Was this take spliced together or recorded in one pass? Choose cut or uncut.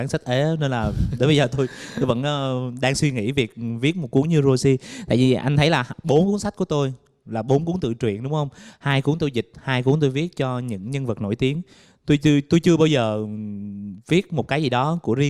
uncut